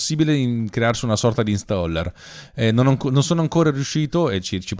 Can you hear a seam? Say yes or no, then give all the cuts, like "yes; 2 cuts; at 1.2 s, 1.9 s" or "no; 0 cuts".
no; 0 cuts